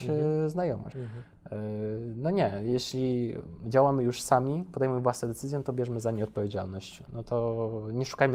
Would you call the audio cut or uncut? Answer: cut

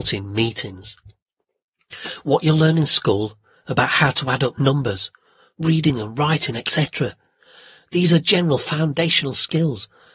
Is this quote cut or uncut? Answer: uncut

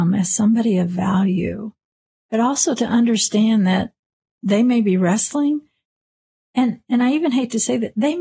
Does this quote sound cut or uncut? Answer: uncut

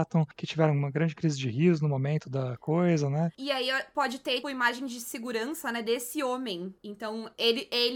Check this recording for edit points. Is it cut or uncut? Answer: cut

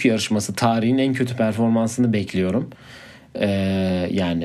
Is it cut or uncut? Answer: uncut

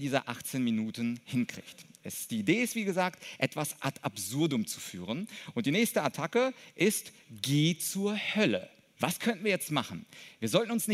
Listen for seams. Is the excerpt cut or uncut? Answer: cut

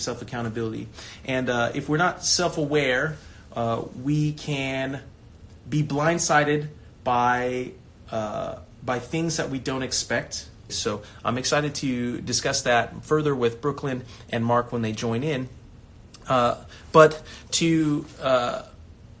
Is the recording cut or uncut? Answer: cut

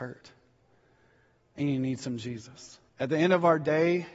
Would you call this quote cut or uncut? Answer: cut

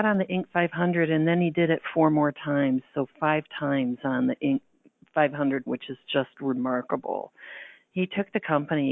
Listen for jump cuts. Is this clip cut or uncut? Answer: cut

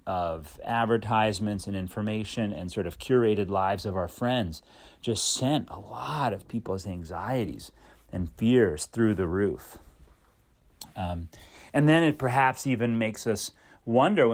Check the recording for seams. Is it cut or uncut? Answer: uncut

